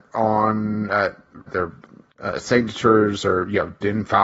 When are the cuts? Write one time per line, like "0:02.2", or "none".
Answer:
0:01.5